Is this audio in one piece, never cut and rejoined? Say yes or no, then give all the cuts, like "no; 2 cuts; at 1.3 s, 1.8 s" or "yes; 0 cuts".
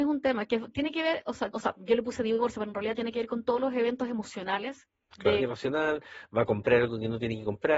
no; 2 cuts; at 1.5 s, 5.4 s